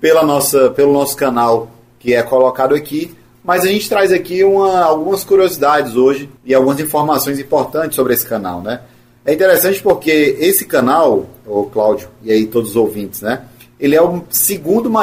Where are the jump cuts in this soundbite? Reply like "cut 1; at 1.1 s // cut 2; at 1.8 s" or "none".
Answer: cut 1; at 6.4 s